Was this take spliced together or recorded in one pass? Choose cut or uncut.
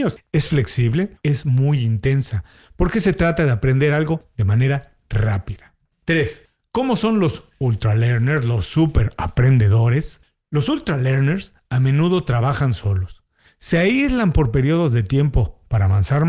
cut